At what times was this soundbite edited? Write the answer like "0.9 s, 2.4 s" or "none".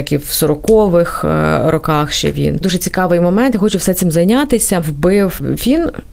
4.8 s